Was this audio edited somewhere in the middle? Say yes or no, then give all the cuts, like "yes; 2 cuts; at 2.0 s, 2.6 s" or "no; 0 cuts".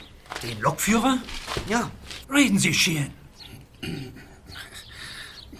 yes; 1 cut; at 2.2 s